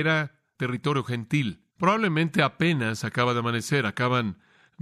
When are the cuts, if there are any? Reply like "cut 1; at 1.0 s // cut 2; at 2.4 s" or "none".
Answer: cut 1; at 1.7 s